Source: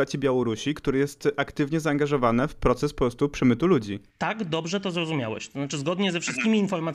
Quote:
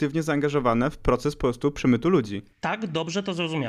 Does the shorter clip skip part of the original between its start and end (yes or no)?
no